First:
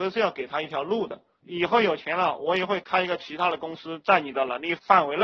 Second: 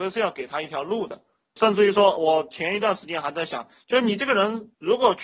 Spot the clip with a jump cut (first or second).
first